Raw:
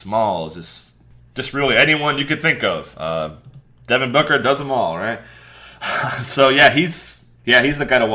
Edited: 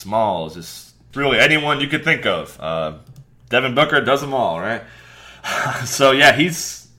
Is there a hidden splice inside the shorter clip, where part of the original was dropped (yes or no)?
yes